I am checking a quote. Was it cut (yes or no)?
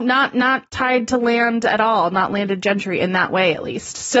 no